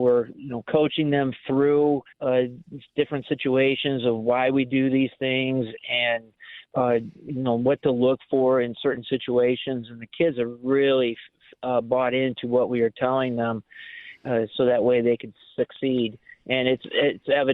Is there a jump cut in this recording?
yes; 1 cut; at 2.1 s

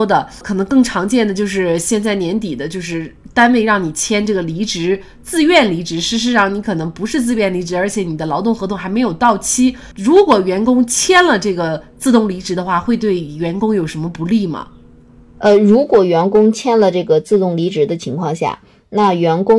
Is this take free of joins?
yes; 0 cuts

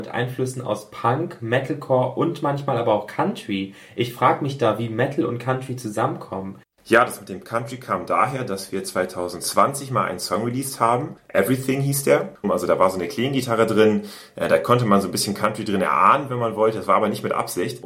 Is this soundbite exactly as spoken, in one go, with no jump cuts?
no; 2 cuts; at 6.6 s, 12.4 s

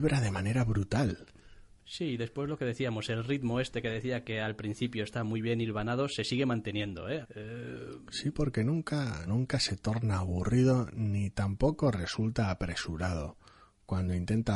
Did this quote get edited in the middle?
yes; 2 cuts; at 7.2 s, 9.3 s

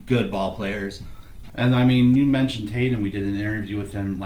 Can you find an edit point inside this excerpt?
yes; 1 cut; at 1.5 s

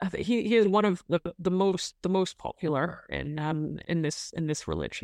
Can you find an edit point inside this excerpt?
yes; 1 cut; at 3.8 s

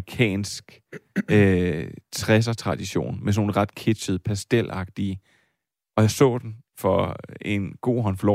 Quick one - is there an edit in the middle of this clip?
yes; 1 cut; at 5.8 s

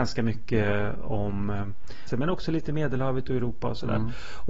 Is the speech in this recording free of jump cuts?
no; 1 cut; at 2.1 s

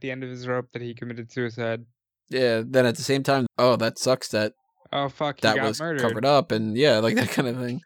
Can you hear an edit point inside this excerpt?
yes; 1 cut; at 3.5 s

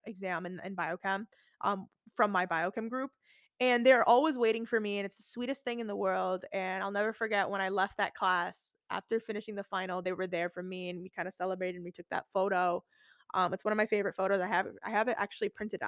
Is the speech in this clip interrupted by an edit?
no; 0 cuts

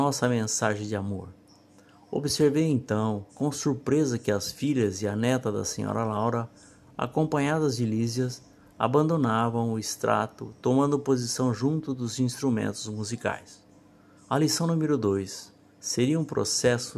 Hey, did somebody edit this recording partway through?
yes; 2 cuts; at 3.3 s, 14.2 s

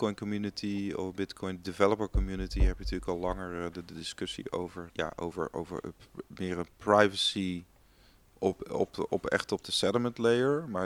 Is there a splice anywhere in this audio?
yes; 1 cut; at 4.9 s

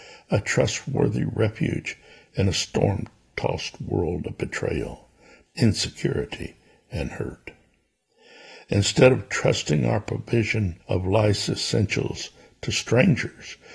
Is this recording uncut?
no; 2 cuts; at 5.5 s, 10.8 s

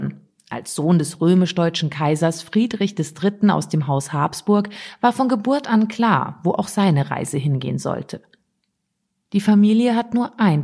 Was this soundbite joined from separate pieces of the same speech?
no; 0 cuts

